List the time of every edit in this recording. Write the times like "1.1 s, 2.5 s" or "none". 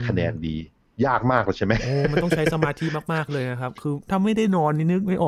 0.9 s